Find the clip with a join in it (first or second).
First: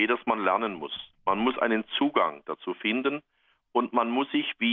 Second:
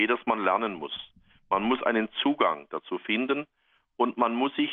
first